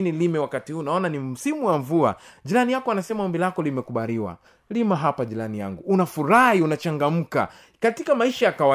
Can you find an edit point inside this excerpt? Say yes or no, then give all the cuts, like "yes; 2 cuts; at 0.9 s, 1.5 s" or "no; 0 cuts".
no; 0 cuts